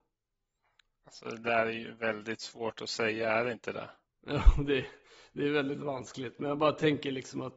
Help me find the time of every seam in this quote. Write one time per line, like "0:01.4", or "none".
none